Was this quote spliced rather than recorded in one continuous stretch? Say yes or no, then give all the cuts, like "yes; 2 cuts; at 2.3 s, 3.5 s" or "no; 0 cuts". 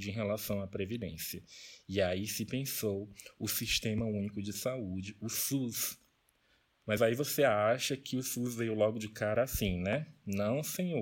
no; 0 cuts